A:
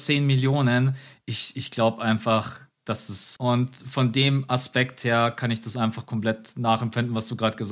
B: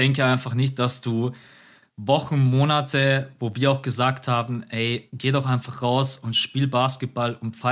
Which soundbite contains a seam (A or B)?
A